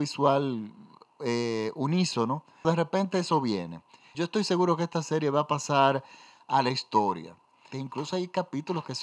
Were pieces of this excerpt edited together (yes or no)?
yes